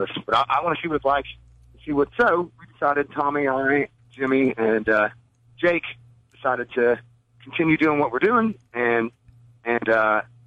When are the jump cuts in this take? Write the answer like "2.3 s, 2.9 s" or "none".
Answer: 2.1 s